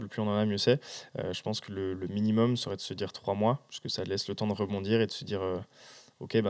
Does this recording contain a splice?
yes; 1 cut; at 2.0 s

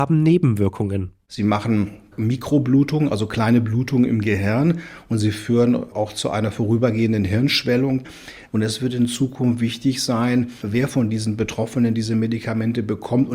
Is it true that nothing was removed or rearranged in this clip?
yes; 0 cuts

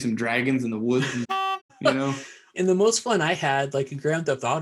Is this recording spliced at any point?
yes; 1 cut; at 2.5 s

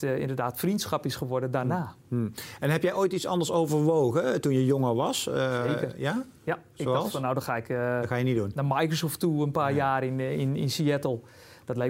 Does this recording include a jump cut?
no; 0 cuts

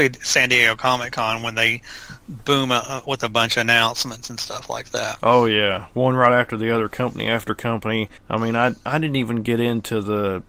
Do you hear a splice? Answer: no; 0 cuts

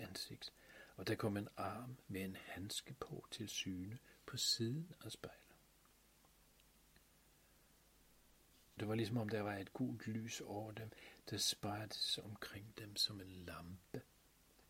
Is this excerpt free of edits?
no; 1 cut; at 8.8 s

